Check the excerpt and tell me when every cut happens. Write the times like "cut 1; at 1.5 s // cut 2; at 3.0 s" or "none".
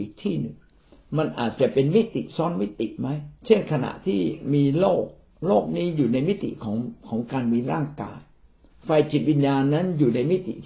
cut 1; at 3.4 s